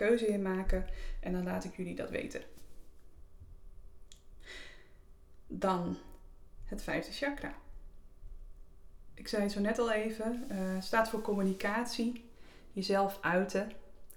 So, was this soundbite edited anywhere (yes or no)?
no